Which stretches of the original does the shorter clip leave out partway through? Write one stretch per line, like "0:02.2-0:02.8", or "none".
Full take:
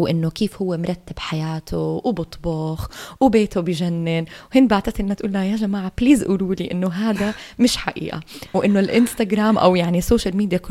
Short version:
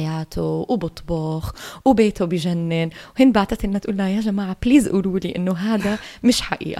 none